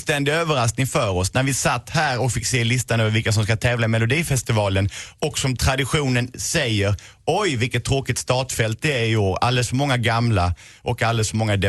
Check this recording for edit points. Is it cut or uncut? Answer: uncut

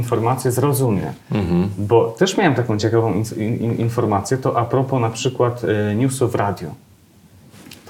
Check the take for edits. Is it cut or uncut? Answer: uncut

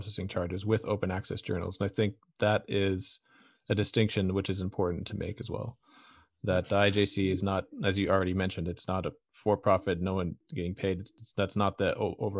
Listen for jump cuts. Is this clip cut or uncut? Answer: uncut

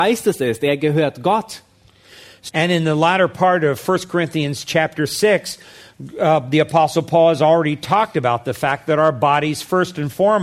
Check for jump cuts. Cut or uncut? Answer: cut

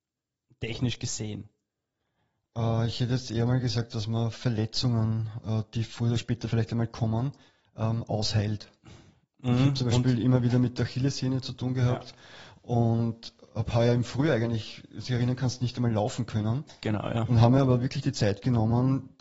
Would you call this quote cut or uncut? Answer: uncut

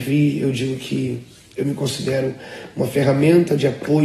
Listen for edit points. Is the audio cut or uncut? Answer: uncut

